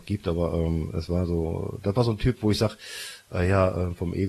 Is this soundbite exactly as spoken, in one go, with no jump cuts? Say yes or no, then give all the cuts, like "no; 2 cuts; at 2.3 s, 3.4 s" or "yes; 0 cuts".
yes; 0 cuts